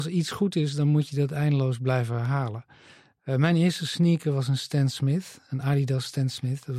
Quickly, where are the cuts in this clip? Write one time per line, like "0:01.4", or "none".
none